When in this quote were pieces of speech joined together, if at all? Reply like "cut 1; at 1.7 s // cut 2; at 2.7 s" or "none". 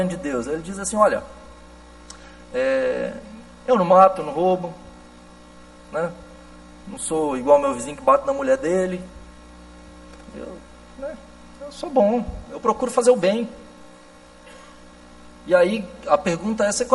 none